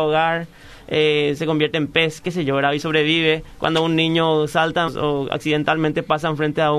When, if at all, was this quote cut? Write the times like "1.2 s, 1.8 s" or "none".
4.9 s